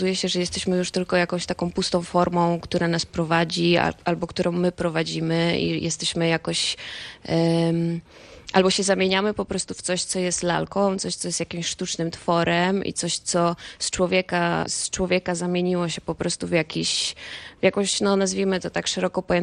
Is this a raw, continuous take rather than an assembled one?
no; 1 cut; at 14.7 s

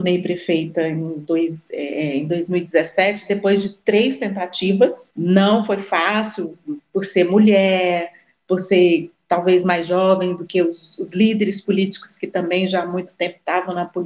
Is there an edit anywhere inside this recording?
yes; 1 cut; at 5.1 s

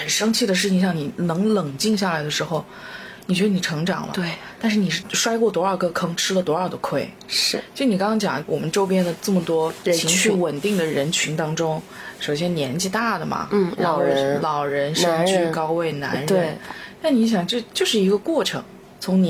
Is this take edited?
no; 0 cuts

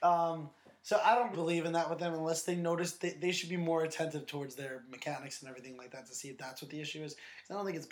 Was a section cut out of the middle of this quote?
yes; 1 cut; at 1.3 s

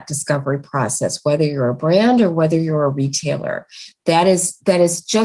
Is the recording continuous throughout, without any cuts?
yes; 0 cuts

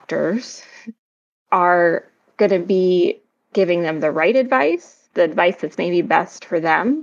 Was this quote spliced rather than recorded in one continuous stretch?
yes; 1 cut; at 5.1 s

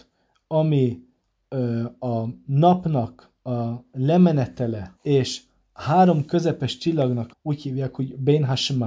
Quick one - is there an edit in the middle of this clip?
yes; 2 cuts; at 4.9 s, 7.3 s

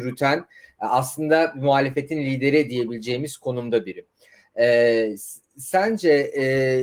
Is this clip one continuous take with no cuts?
yes; 0 cuts

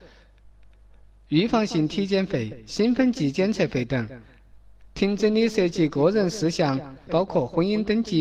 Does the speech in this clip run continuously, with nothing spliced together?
no; 1 cut; at 7.1 s

